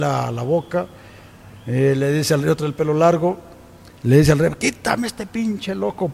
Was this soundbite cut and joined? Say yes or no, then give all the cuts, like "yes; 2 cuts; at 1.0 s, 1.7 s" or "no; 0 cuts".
no; 0 cuts